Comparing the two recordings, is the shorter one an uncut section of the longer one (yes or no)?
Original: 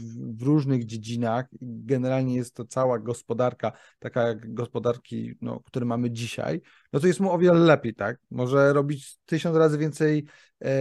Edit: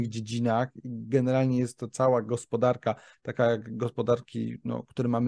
yes